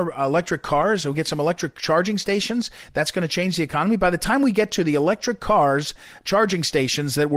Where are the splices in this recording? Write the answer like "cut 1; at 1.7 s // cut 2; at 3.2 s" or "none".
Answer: none